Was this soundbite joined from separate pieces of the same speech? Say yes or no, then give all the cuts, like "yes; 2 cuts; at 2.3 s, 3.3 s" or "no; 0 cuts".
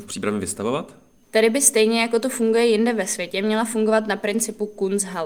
yes; 1 cut; at 1.2 s